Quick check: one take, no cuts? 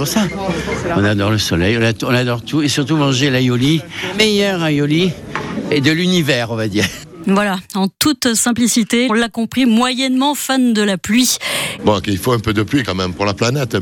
no; 2 cuts; at 9.1 s, 11.8 s

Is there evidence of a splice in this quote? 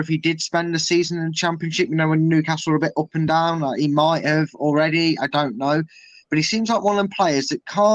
no; 0 cuts

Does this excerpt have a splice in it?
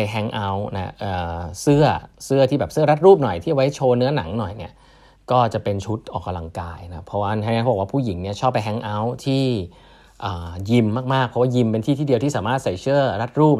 no; 0 cuts

